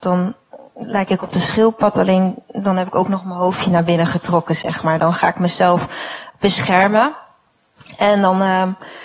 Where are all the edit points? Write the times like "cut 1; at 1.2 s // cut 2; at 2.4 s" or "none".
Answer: none